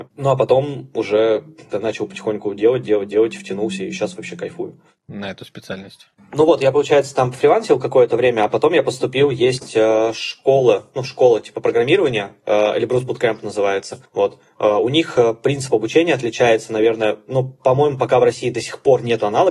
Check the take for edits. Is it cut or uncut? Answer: cut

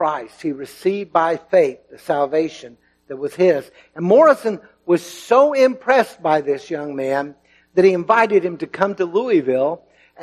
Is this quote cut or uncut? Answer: uncut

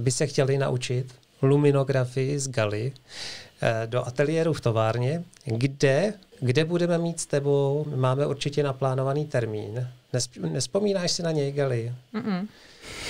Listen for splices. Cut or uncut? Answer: cut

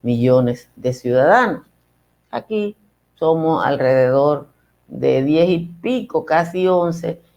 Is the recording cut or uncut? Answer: uncut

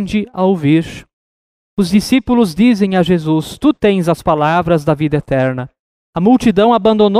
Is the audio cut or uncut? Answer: uncut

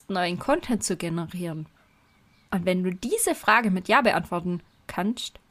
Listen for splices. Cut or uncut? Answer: uncut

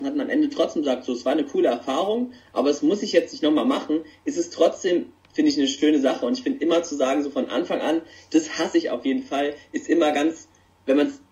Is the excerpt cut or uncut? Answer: uncut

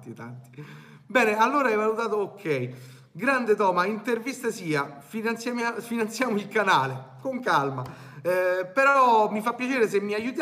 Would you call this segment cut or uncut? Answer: uncut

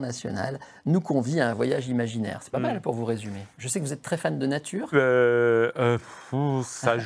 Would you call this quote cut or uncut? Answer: cut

